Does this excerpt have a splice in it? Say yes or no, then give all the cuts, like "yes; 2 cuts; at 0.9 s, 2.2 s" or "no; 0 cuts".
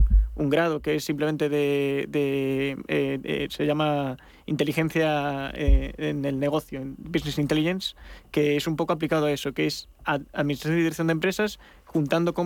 no; 0 cuts